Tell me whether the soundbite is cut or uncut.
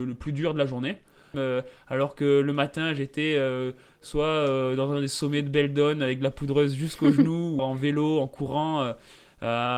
cut